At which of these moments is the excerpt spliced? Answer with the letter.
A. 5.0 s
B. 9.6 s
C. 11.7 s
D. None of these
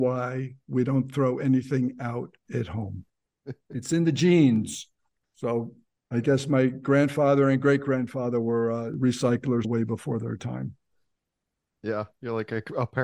B